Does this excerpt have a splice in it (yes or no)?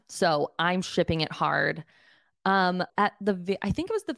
yes